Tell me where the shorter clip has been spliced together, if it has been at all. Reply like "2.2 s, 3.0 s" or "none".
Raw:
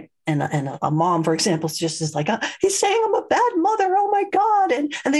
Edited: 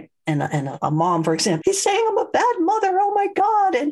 1.6 s